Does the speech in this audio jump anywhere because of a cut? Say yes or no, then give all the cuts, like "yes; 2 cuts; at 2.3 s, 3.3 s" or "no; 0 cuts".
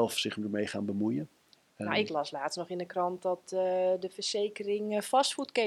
no; 0 cuts